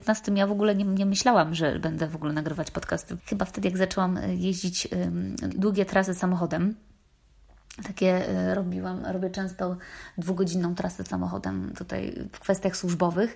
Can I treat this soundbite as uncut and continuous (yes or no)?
no